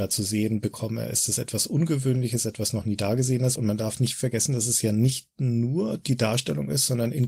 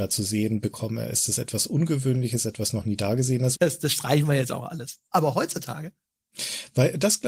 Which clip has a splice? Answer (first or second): second